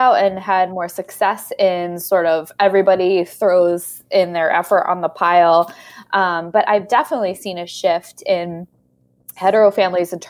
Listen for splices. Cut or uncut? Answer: uncut